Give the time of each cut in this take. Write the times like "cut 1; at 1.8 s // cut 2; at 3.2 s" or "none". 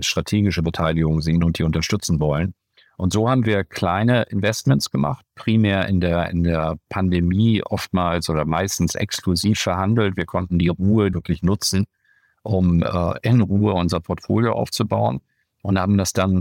cut 1; at 11.1 s